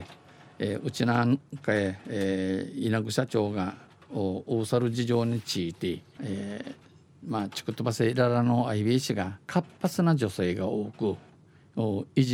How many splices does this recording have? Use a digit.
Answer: 2